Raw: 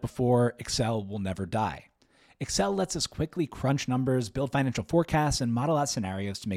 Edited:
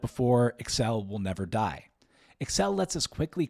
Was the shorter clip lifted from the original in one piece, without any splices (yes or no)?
yes